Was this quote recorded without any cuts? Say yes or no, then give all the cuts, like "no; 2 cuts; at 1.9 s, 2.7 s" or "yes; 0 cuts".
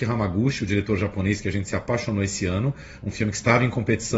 yes; 0 cuts